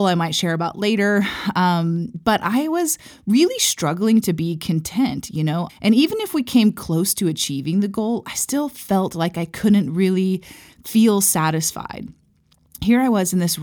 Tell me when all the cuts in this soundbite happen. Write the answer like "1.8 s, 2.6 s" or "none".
5.7 s